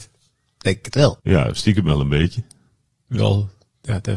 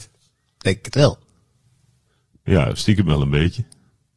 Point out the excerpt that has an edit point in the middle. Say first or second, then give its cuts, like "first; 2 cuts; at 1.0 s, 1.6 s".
first; 1 cut; at 1.2 s